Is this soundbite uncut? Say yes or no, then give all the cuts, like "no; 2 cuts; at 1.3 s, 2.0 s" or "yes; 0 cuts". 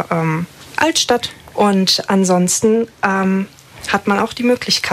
no; 1 cut; at 1.5 s